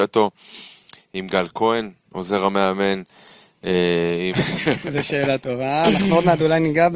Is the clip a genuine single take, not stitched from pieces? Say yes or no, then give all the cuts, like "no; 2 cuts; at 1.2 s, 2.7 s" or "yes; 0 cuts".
no; 1 cut; at 4.3 s